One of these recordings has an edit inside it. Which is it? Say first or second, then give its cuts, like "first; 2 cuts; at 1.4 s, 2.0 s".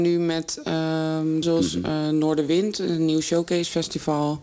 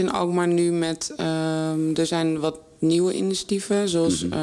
first; 1 cut; at 1.4 s